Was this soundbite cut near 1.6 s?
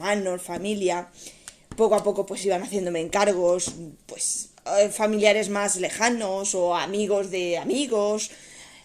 no; 0 cuts

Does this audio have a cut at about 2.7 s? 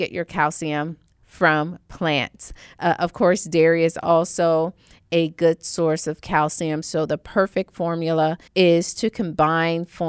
no; 2 cuts; at 6.8 s, 8.5 s

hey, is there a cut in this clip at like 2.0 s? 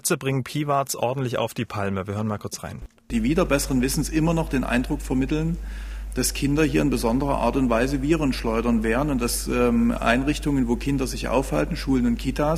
no; 0 cuts

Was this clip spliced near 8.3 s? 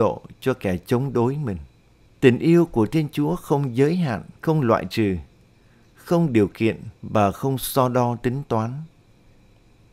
no; 3 cuts; at 2.1 s, 4.4 s, 7.0 s

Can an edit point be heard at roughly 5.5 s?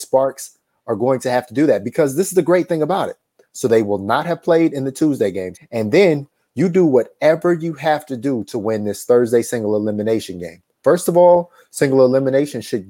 yes; 1 cut; at 5.5 s

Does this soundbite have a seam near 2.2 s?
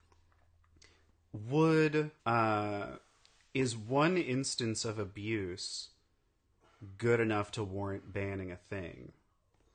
yes; 1 cut; at 2.2 s

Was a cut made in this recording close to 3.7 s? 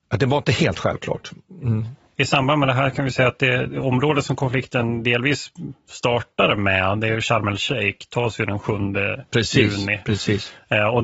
yes; 1 cut; at 3.7 s

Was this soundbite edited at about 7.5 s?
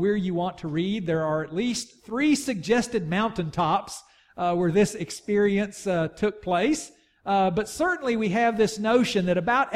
no; 0 cuts

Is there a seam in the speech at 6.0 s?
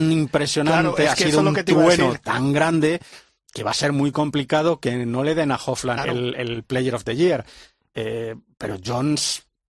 yes; 1 cut; at 6.0 s

